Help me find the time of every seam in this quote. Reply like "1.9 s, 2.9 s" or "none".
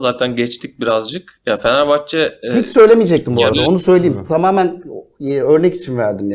none